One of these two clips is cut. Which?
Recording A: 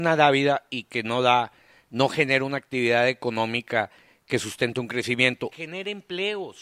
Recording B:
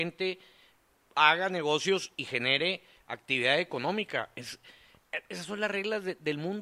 A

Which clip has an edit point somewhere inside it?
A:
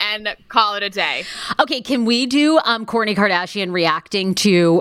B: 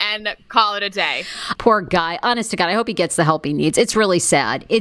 B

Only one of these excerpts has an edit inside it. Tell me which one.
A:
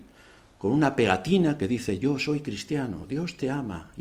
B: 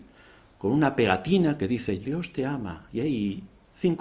B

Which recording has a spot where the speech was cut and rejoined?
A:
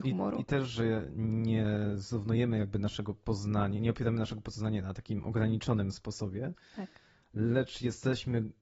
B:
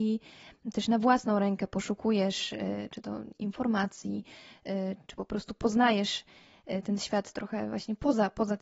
B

